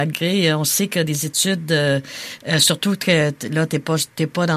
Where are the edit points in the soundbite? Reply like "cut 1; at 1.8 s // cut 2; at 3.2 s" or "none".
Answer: cut 1; at 2.4 s